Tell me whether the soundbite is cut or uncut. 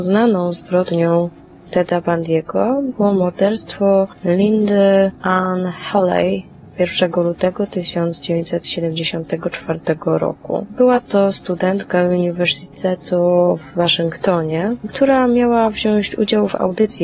uncut